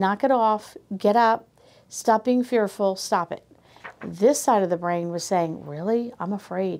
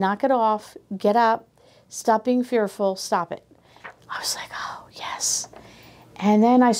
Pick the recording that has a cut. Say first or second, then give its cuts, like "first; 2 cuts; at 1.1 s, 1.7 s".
second; 1 cut; at 4.0 s